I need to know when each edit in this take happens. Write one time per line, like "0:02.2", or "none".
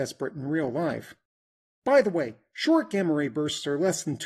0:01.7